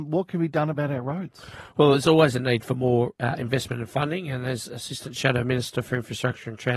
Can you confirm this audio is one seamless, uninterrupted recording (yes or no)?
yes